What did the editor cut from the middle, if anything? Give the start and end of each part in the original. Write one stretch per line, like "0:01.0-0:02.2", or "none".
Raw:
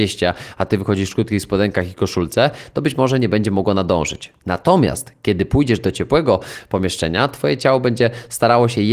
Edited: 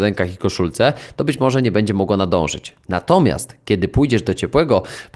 none